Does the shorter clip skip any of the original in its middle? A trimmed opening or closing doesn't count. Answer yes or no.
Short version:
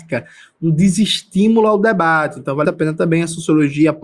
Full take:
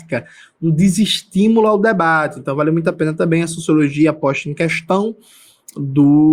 yes